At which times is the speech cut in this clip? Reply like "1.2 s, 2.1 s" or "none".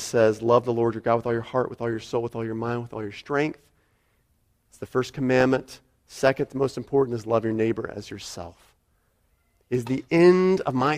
none